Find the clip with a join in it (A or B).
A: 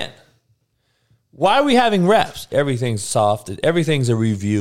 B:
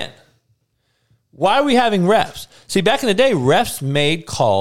A